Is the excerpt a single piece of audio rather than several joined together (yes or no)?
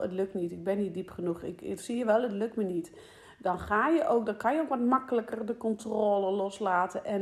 no